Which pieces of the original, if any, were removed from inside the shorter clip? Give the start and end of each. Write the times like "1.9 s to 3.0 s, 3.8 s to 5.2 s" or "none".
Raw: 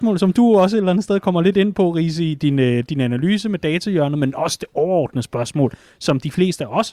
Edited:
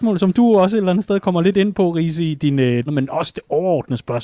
2.9 s to 4.1 s